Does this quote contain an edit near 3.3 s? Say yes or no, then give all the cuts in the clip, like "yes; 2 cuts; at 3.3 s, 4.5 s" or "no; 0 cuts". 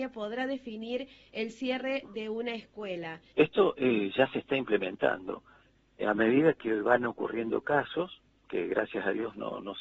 yes; 1 cut; at 3.3 s